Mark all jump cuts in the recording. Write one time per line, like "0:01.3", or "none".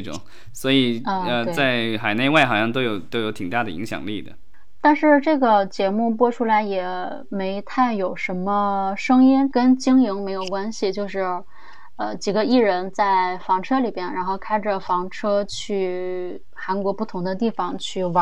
0:09.5